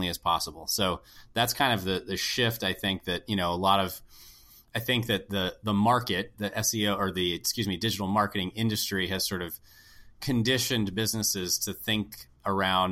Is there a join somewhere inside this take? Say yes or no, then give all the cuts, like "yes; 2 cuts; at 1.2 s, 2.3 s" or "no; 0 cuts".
yes; 1 cut; at 6.3 s